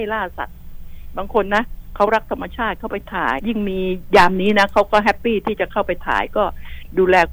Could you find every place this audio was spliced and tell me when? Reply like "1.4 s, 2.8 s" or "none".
3.4 s